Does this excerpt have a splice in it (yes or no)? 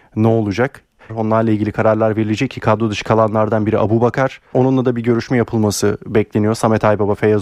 yes